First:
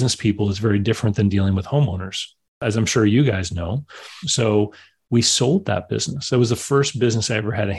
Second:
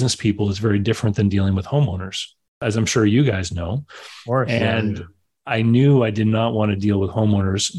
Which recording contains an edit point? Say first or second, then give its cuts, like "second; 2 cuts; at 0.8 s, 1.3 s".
first; 1 cut; at 4.2 s